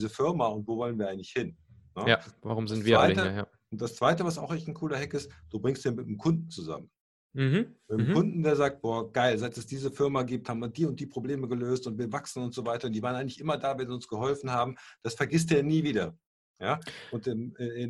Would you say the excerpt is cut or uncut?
uncut